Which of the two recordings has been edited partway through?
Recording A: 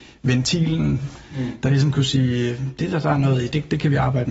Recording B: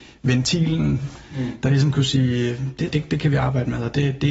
B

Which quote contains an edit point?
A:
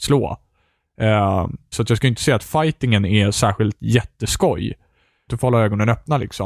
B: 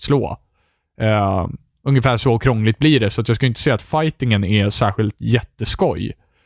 A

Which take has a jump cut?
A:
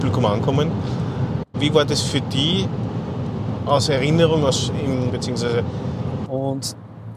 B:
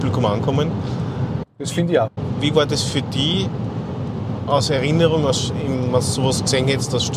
A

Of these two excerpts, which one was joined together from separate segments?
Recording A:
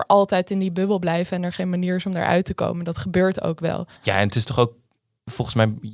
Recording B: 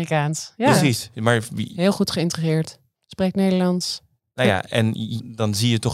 A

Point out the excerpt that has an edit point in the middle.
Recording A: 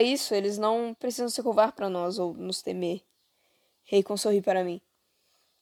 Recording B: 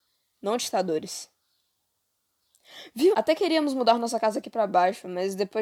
B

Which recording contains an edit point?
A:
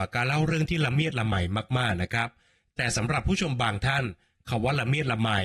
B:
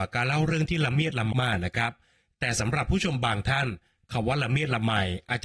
B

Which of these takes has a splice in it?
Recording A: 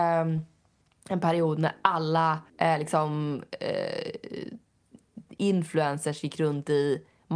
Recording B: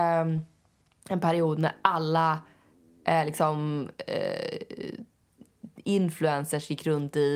A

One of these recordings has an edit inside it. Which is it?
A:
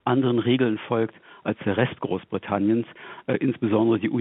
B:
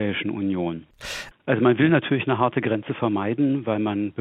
B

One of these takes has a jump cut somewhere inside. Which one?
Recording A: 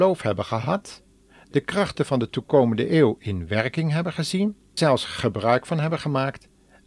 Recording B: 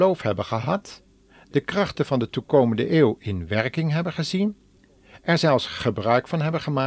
A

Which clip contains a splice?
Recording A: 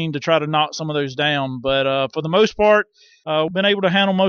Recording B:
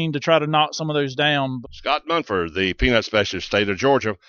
B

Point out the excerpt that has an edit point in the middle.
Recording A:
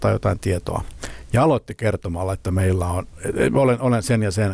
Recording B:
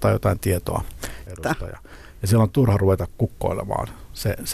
B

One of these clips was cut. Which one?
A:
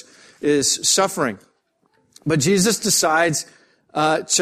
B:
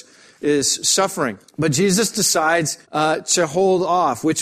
B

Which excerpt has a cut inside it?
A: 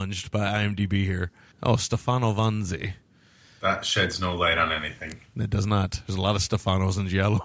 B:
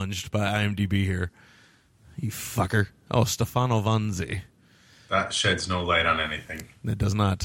A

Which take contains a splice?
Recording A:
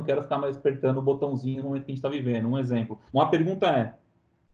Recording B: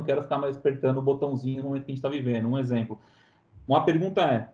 A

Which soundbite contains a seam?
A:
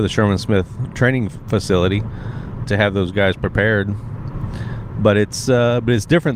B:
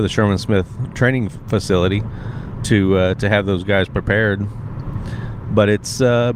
A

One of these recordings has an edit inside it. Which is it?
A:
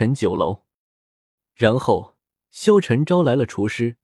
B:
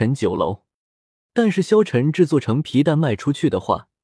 B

